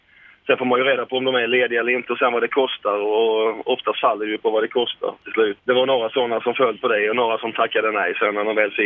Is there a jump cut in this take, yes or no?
yes